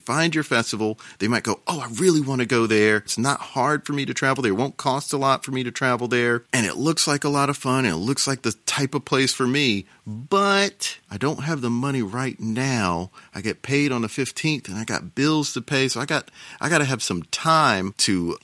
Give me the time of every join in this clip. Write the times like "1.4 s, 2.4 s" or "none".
11.0 s